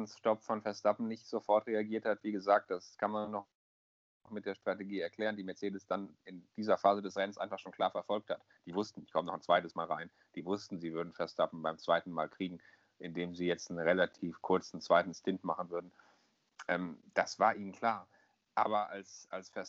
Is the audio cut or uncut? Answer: uncut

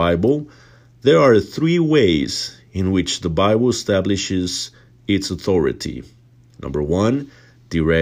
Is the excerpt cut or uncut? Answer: uncut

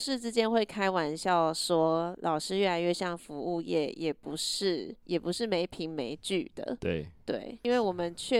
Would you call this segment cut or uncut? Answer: uncut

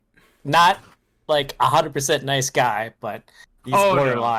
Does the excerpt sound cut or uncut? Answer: uncut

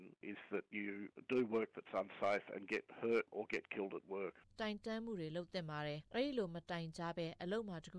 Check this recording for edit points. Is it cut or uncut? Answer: cut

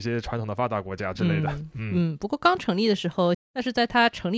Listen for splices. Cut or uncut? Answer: cut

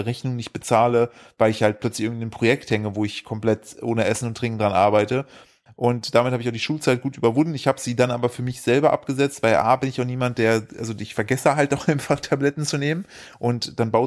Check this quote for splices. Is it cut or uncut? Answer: cut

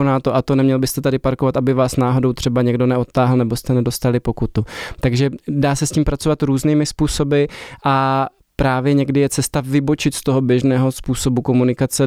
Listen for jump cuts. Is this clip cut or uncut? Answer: uncut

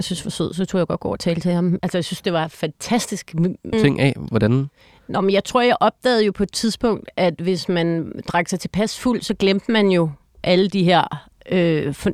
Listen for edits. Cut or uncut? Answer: cut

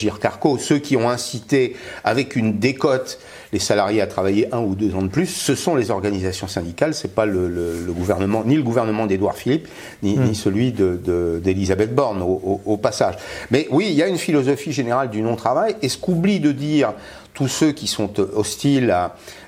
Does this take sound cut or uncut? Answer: uncut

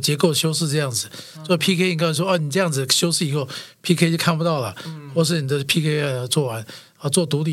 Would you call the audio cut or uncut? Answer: uncut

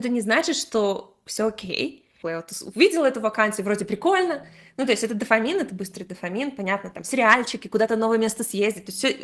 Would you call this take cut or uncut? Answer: cut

